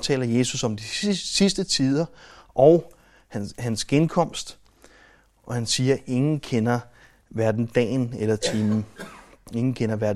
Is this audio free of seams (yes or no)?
yes